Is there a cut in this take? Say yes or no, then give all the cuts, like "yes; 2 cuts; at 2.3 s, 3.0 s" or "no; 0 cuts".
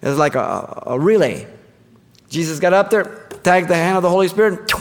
no; 0 cuts